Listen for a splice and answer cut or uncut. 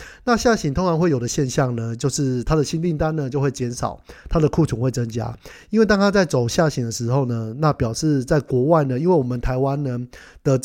uncut